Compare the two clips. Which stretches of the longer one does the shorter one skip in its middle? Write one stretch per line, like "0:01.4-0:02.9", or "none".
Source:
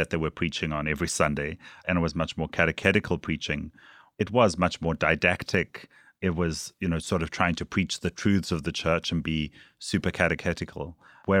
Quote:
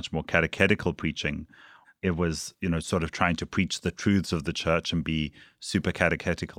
0:04.1-0:06.0